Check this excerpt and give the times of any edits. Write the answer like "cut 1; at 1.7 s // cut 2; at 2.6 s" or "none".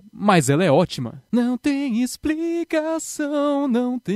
none